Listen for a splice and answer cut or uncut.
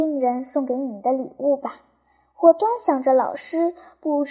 uncut